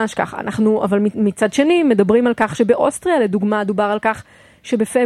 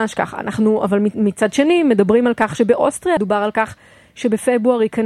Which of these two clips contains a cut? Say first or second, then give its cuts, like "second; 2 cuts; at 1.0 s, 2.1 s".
second; 1 cut; at 3.2 s